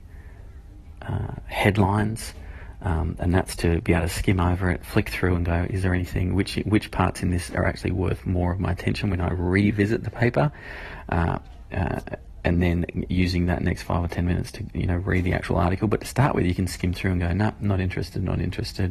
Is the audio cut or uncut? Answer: uncut